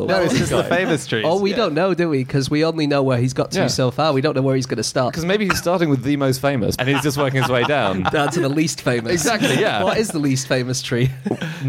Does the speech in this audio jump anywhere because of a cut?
yes; 1 cut; at 6.8 s

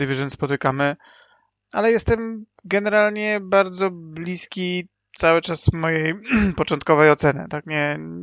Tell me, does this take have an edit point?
no; 0 cuts

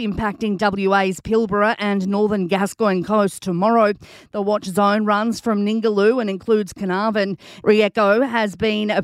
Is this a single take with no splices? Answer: no; 1 cut; at 7.6 s

